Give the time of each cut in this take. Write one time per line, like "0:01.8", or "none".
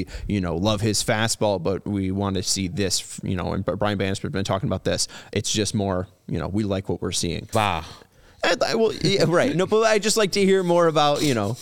0:07.5